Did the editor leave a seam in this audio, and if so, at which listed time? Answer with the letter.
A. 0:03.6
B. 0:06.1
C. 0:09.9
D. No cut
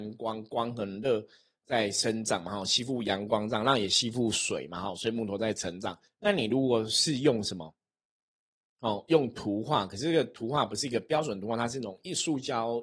B